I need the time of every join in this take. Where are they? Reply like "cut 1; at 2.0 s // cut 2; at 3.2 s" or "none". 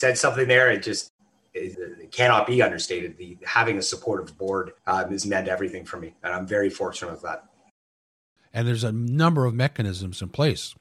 cut 1; at 1.7 s // cut 2; at 4.8 s // cut 3; at 8.4 s